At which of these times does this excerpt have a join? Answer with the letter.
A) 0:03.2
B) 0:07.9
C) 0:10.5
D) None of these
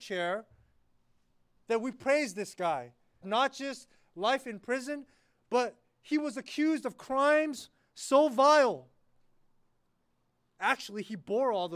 A